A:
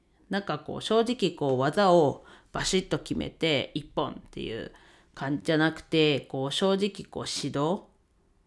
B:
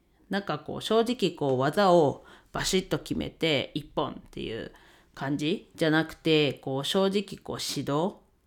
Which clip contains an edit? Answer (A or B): A